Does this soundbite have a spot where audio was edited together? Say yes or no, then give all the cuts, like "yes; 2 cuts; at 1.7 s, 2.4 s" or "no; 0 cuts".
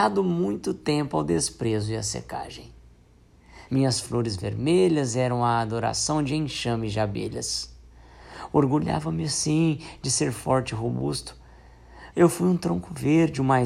yes; 2 cuts; at 3.7 s, 12.1 s